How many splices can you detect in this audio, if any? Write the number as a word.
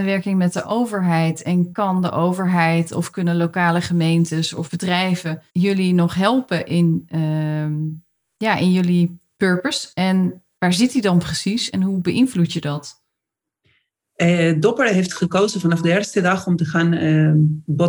one